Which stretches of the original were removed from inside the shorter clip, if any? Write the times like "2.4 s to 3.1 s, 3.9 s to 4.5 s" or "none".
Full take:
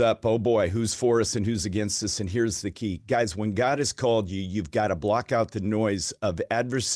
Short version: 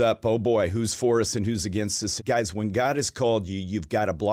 2.2 s to 3.0 s